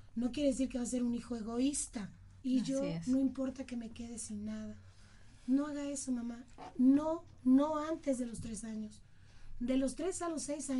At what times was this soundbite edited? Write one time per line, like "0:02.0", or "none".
0:02.4

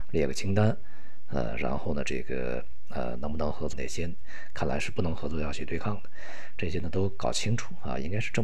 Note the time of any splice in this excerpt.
0:03.7

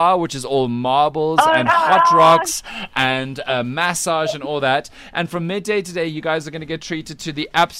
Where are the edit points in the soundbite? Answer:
none

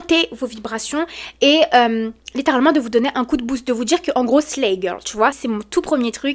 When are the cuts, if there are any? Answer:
0:05.3

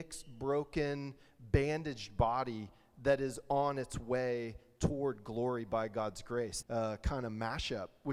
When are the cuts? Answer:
0:06.6

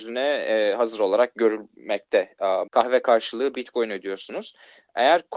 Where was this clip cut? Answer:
0:02.7

